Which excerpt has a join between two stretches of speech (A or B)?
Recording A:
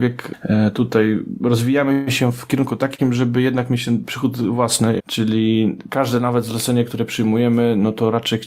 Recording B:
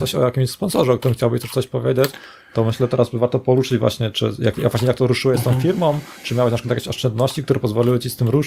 A